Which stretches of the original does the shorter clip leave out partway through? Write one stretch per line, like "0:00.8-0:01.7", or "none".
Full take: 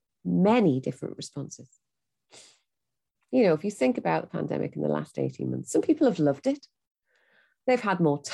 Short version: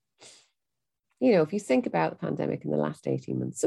none